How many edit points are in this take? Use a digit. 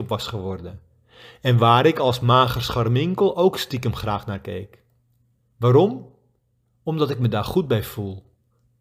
1